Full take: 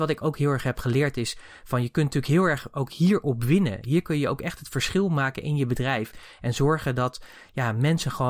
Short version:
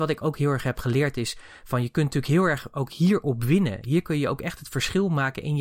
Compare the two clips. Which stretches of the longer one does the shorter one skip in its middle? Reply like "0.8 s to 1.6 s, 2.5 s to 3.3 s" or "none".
none

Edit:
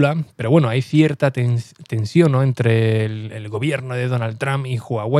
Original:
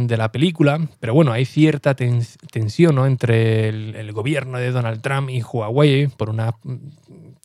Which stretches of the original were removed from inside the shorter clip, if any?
none

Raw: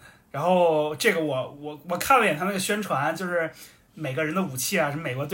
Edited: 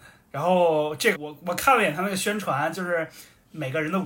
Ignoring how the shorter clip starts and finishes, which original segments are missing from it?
1.1 s to 1.6 s

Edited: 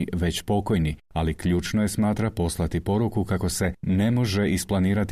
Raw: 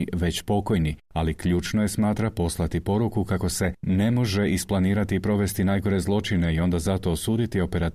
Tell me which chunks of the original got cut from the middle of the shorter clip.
none

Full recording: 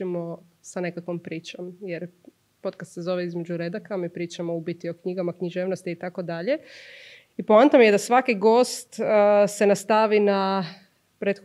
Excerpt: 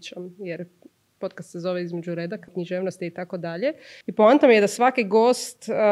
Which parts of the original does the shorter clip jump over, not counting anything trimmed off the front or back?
3.9 s to 5.3 s, 6.9 s to 7.3 s

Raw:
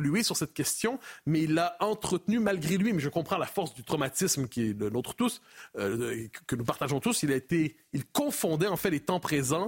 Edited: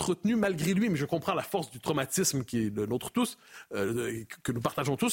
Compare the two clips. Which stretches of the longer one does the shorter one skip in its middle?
none

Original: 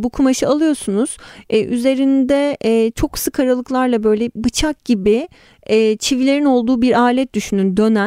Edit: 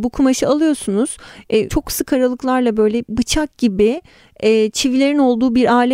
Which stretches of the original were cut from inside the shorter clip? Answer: 1.7 s to 2.9 s

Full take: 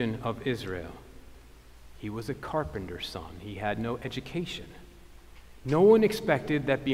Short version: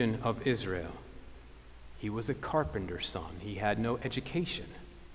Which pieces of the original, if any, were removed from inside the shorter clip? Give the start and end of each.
none

